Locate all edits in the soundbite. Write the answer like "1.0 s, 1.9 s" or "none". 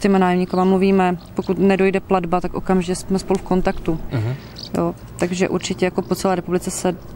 4.1 s